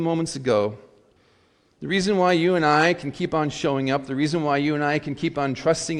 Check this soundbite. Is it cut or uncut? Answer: uncut